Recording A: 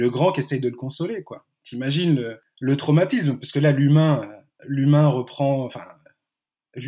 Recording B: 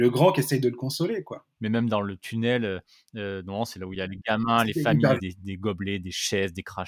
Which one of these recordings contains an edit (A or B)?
B